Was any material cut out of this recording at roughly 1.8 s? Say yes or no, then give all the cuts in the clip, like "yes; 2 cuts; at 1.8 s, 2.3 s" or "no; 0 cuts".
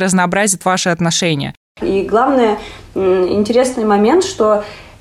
yes; 1 cut; at 1.8 s